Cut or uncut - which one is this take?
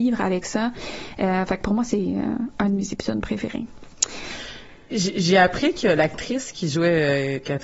cut